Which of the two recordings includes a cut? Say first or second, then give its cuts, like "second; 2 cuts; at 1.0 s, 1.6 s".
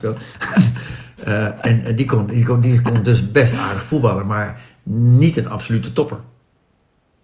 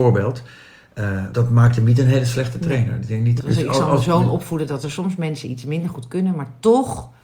second; 2 cuts; at 1.3 s, 3.4 s